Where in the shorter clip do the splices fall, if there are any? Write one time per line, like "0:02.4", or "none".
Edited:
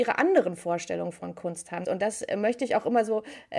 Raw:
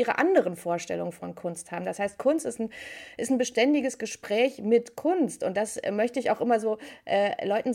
0:01.8